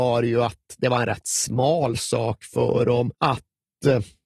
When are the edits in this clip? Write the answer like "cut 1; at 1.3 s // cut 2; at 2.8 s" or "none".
cut 1; at 3.1 s